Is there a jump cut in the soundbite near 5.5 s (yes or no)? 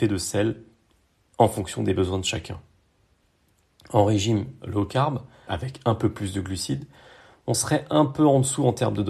yes